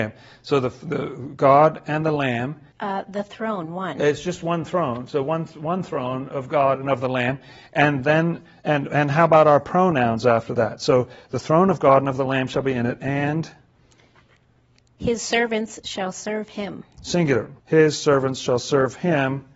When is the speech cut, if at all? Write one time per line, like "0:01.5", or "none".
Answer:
0:02.7
0:17.6